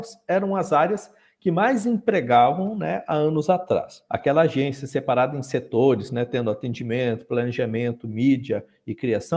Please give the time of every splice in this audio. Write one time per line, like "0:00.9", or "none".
0:04.1